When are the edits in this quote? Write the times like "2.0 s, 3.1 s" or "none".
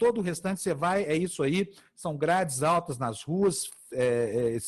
none